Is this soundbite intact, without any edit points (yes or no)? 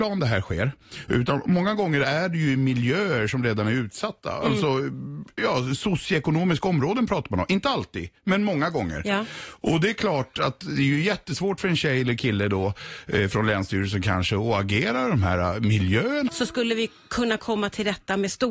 no